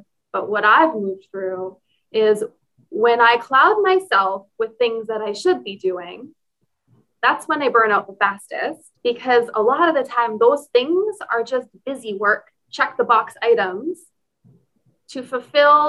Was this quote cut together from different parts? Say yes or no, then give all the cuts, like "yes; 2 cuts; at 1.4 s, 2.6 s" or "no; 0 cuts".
yes; 1 cut; at 9.0 s